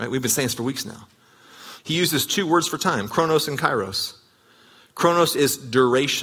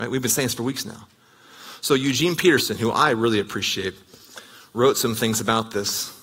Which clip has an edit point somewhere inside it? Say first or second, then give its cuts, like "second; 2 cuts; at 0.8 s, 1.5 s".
first; 1 cut; at 1.8 s